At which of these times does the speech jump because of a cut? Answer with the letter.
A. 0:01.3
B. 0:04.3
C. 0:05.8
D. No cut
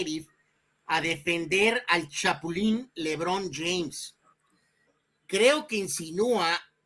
B